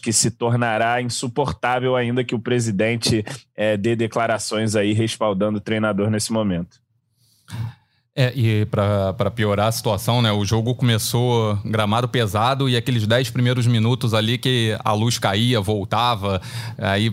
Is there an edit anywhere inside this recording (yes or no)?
no